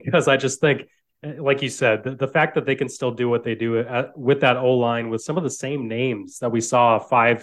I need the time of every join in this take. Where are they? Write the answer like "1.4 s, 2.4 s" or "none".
none